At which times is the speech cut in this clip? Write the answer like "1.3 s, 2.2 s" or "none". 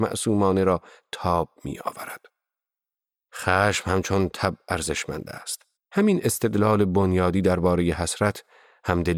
5.8 s